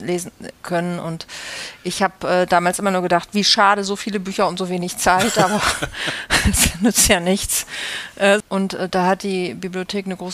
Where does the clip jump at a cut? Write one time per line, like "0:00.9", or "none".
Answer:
0:08.4